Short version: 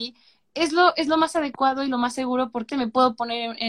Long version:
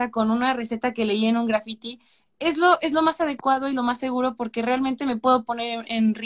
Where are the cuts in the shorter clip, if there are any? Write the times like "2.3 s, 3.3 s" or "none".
2.7 s